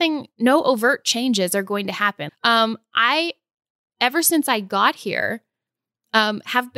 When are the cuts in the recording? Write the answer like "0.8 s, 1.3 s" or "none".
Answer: 2.3 s